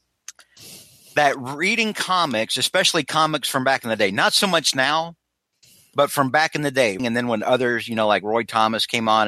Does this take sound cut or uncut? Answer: cut